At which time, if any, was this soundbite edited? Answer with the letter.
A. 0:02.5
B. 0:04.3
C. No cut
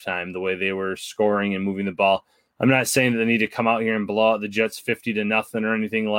C